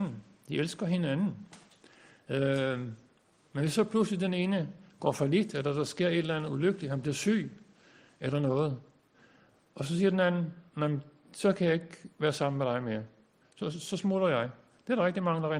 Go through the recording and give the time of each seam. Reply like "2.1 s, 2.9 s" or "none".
10.7 s